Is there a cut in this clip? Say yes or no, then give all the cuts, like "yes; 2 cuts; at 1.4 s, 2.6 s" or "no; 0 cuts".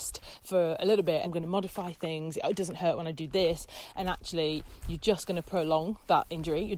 yes; 1 cut; at 1.2 s